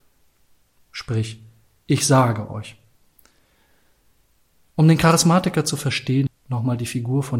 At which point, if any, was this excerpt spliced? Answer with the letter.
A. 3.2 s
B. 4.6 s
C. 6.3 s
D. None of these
C